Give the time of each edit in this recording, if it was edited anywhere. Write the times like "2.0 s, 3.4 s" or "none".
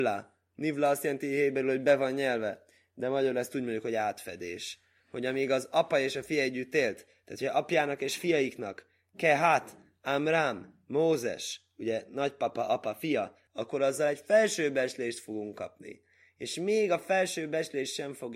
13.5 s